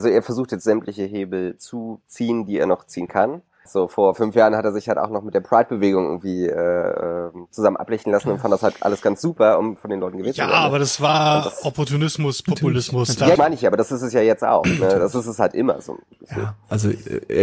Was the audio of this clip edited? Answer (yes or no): yes